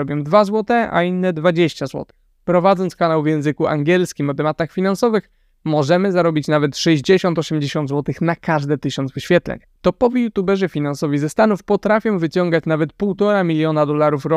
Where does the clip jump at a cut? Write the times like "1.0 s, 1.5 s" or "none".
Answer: none

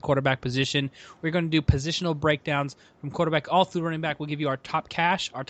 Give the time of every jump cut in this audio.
none

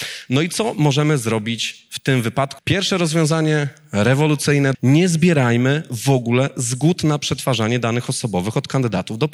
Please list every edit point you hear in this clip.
2.6 s, 4.7 s

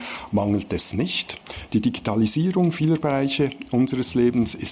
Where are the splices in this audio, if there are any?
none

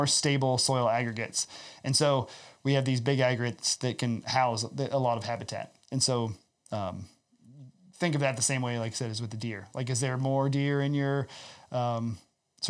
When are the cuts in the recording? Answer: none

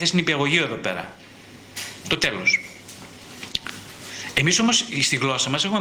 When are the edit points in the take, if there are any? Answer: 2.0 s

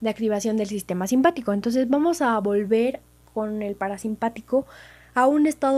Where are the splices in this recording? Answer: none

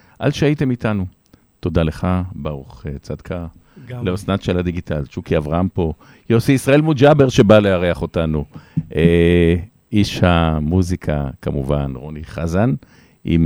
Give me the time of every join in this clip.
none

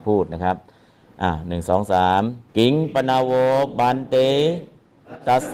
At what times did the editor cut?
2.5 s

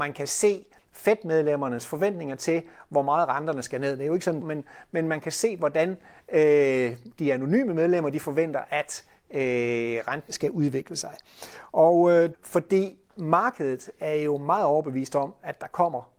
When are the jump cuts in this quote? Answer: 4.4 s, 10.3 s, 12.3 s

